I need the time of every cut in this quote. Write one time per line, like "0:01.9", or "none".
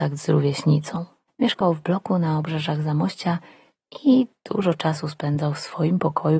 0:01.3